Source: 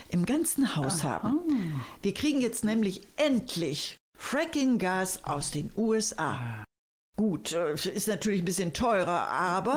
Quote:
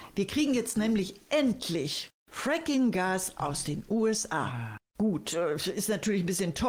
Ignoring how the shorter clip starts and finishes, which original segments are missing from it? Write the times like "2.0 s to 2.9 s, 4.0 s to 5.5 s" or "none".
6.7 s to 7.1 s